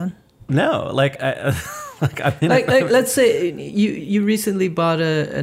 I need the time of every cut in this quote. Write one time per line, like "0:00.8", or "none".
0:01.2